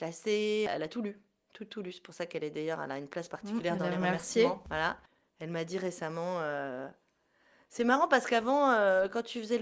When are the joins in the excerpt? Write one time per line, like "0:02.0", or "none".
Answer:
none